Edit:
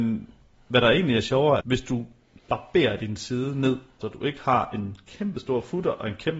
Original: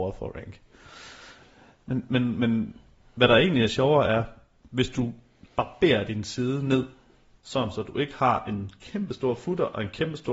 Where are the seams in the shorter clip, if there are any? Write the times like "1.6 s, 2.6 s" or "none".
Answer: 1.6 s, 4.0 s